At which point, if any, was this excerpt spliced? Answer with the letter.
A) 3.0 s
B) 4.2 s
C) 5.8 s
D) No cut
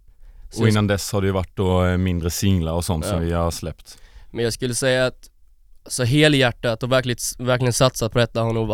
D